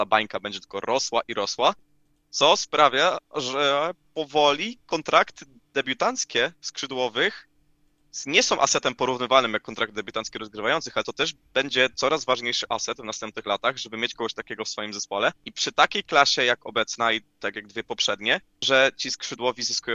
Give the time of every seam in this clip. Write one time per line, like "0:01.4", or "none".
0:15.4
0:18.6

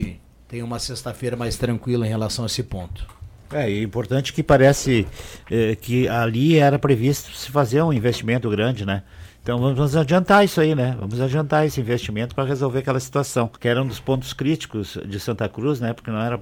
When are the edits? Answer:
0:08.4
0:13.6

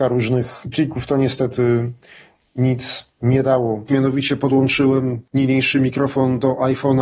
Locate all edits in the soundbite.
0:03.9
0:05.3

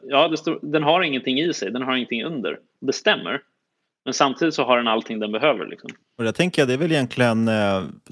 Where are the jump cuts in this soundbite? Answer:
none

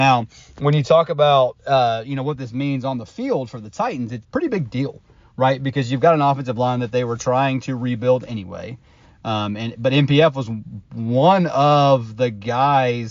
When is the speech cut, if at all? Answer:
0:04.2

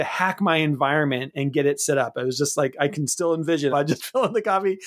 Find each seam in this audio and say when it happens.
0:03.7

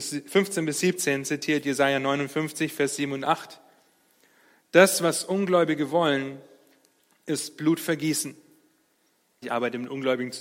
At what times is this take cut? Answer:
0:09.4

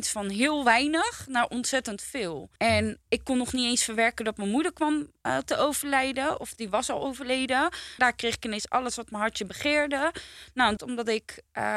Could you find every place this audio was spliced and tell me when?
0:02.6
0:08.0
0:10.8

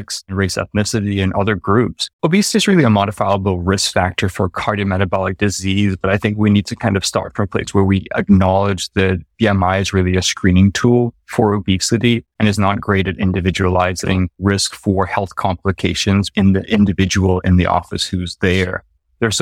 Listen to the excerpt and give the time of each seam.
0:02.1
0:16.3

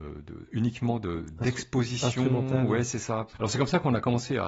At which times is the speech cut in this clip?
0:03.3

